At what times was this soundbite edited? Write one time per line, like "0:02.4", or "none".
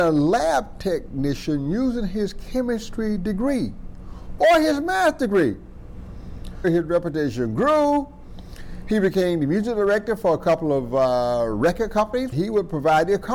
0:04.4
0:06.6
0:12.3